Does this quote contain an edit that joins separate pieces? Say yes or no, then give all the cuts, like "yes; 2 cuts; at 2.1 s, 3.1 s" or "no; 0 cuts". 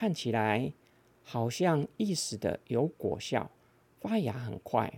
no; 0 cuts